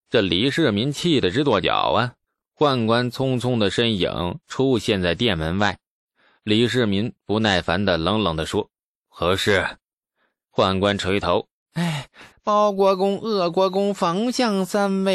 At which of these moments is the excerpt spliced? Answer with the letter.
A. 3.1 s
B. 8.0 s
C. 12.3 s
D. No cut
C